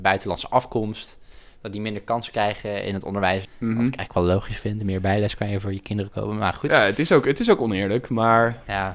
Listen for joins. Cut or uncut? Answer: cut